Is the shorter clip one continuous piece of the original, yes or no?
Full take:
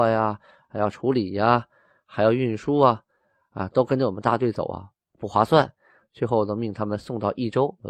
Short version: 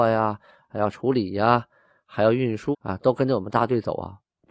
no